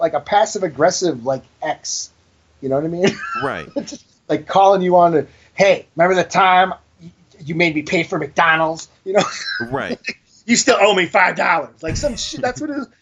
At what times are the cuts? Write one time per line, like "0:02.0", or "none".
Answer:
0:05.9